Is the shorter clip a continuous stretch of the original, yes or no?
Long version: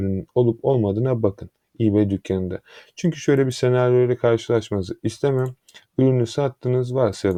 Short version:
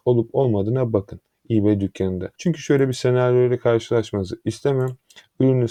no